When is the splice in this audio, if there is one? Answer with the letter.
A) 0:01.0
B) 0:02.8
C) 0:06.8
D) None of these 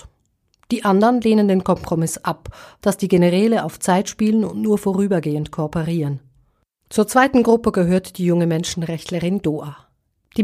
B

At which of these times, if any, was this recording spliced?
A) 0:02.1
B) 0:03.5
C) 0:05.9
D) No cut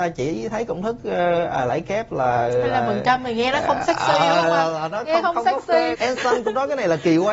C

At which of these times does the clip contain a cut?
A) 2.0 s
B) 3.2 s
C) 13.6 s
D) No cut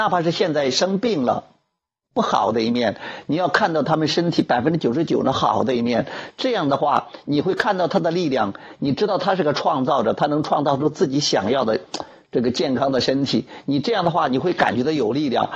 A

